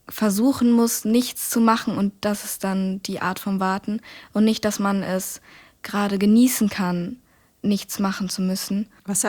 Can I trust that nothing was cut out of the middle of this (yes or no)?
yes